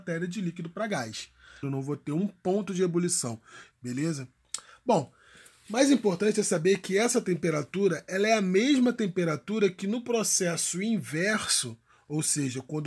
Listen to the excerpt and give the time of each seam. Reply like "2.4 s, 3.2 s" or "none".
1.6 s, 3.7 s